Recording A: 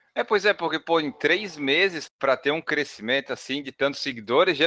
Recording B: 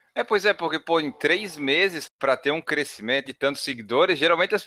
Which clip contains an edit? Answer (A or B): B